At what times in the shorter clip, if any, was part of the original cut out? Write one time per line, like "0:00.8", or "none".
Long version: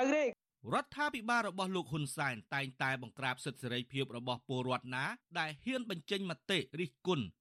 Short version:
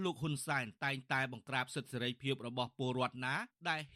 none